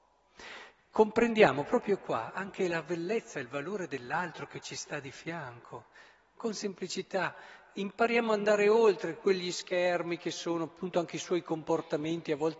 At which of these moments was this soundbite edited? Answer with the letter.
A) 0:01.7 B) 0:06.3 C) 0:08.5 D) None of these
D